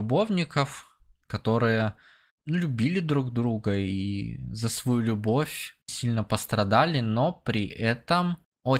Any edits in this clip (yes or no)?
yes